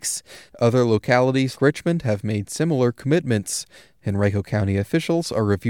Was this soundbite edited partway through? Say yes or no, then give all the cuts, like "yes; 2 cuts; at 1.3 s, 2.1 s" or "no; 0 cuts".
yes; 1 cut; at 1.6 s